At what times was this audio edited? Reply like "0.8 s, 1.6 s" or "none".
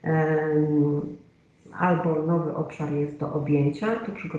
3.2 s